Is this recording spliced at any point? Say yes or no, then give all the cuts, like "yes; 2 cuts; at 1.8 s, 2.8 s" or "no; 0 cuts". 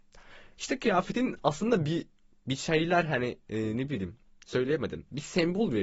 no; 0 cuts